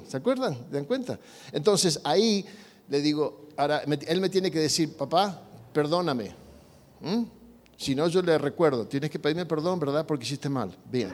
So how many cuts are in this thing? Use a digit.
0